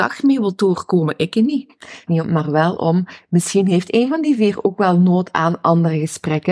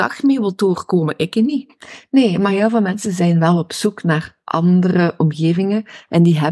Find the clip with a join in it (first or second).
first